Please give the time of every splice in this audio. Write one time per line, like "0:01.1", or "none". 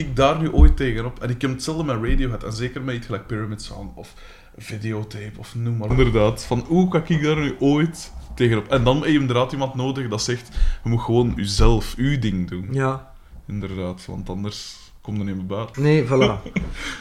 0:05.9
0:15.7